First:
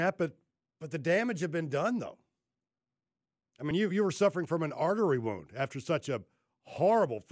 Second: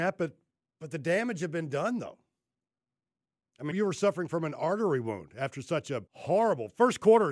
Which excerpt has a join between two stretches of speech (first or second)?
second